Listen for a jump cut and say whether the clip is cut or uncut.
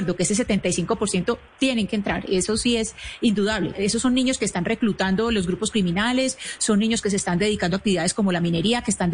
cut